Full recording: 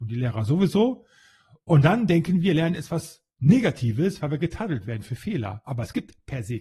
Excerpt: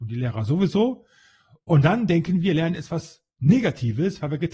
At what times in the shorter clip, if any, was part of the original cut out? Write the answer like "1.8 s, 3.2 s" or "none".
none